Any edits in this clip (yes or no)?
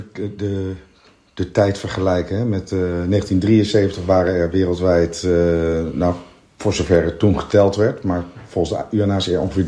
no